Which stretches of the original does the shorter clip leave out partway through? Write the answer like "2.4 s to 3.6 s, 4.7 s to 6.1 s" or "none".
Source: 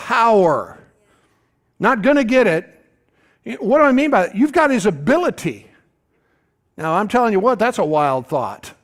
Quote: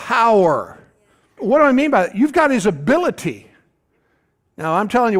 1.4 s to 3.6 s